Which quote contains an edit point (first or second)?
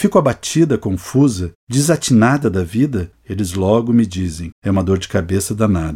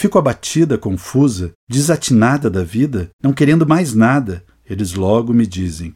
first